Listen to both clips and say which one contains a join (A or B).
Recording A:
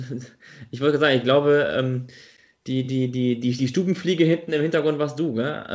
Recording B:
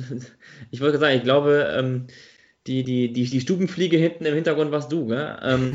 B